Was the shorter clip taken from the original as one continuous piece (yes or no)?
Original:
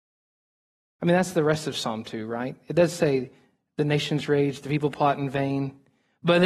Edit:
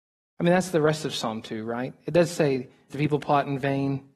no